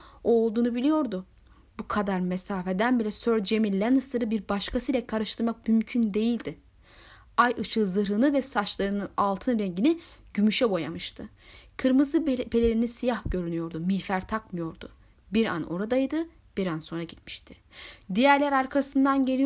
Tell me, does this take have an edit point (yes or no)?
yes